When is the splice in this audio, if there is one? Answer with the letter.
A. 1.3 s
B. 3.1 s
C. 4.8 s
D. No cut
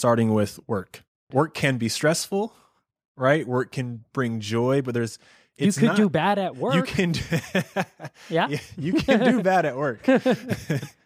A